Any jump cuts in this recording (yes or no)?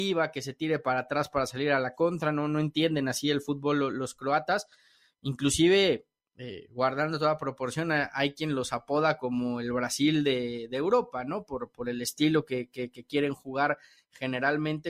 no